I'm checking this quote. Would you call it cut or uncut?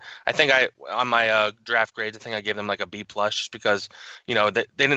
uncut